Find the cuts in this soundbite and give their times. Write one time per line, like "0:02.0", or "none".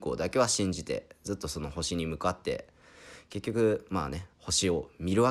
0:04.3